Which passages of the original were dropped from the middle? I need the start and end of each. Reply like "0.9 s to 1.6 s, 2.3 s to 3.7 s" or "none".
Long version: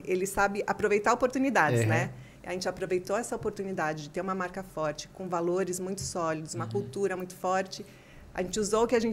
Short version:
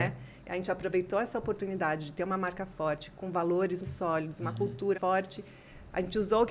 5.8 s to 6.0 s, 7.1 s to 7.4 s